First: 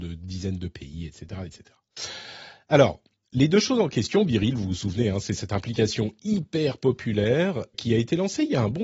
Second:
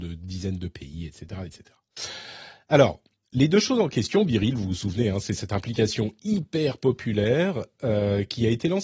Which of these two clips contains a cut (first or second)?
first